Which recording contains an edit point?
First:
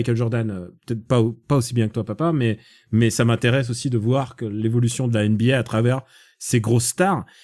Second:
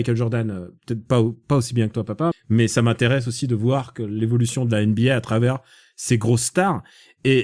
second; 1 cut; at 2.3 s

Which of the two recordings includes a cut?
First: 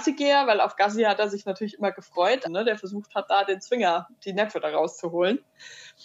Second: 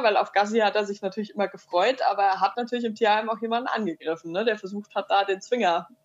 first; 2 cuts; at 2.4 s, 4.1 s

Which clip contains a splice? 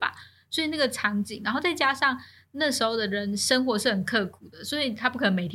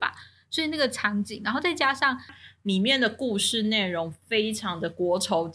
second; 1 cut; at 2.3 s

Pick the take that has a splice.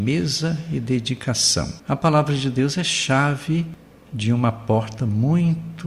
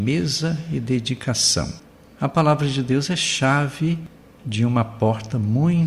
first; 1 cut; at 1.8 s

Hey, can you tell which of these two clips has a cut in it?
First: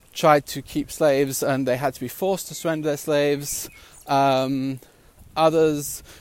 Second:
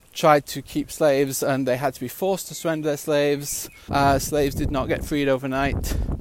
second; 1 cut; at 3.9 s

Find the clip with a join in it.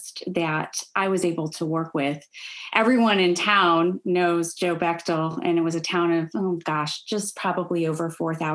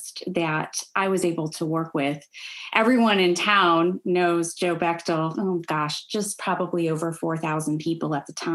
second; 1 cut; at 5.3 s

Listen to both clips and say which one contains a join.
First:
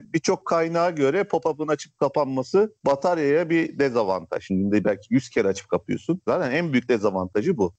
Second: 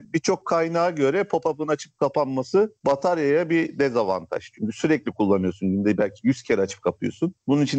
first; 2 cuts; at 4.5 s, 6.3 s

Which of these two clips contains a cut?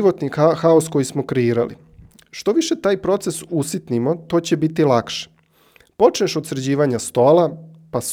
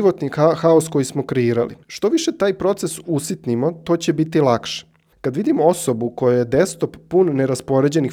second; 2 cuts; at 1.8 s, 5.1 s

